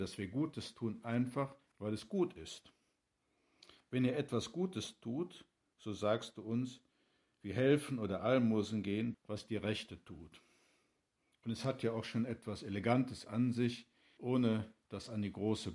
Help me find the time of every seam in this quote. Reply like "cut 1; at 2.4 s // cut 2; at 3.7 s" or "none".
cut 1; at 1.7 s // cut 2; at 9.1 s // cut 3; at 14.2 s